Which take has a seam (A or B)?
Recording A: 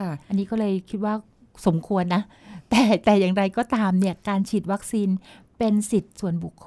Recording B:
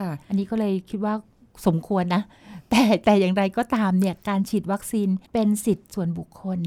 B